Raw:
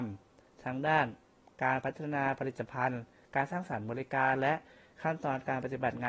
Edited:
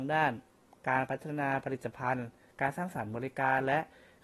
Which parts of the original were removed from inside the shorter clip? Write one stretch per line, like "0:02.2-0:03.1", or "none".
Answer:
none